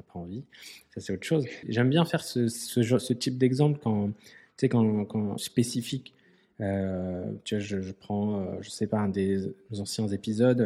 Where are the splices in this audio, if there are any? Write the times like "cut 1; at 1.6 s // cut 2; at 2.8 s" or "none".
cut 1; at 1.6 s // cut 2; at 5.4 s